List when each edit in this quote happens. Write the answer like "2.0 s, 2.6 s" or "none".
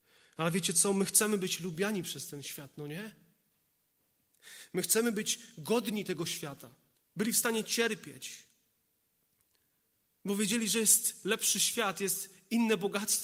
7.0 s